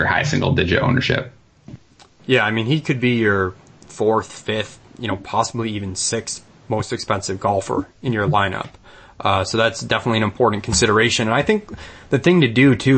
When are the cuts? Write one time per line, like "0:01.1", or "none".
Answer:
none